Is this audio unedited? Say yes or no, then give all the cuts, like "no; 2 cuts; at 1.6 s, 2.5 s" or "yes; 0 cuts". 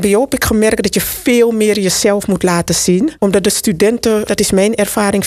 no; 2 cuts; at 3.2 s, 4.3 s